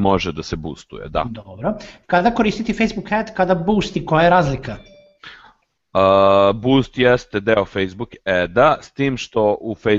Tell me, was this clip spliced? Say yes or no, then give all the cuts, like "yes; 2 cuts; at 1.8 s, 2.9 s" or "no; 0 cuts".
no; 0 cuts